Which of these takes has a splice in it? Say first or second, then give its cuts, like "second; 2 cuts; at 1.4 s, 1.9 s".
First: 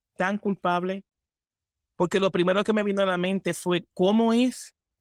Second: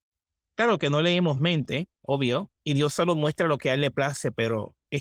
second; 1 cut; at 2.5 s